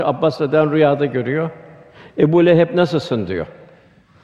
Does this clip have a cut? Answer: no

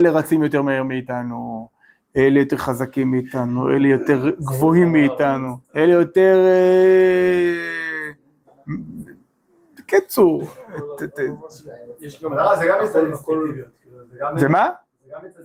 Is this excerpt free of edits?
no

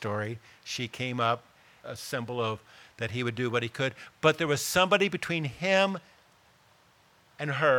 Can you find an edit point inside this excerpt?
yes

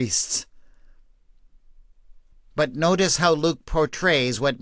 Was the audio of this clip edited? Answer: no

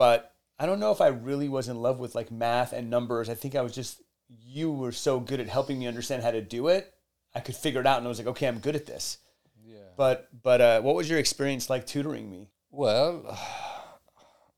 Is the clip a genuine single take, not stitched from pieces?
yes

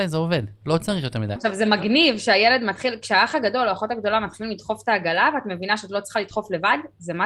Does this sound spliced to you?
yes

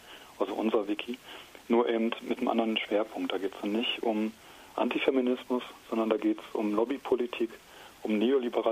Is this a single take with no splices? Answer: yes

